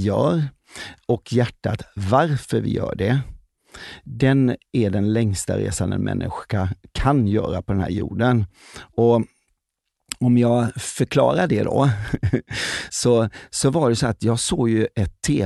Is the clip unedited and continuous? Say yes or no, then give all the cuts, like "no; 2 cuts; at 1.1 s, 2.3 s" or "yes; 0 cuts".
yes; 0 cuts